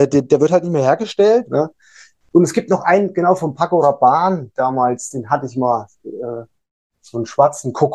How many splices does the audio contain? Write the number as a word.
one